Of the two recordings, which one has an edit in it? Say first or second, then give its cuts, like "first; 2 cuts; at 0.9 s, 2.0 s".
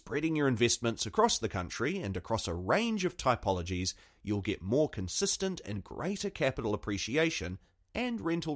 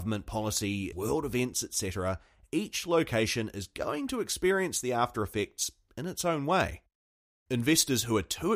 second; 1 cut; at 0.9 s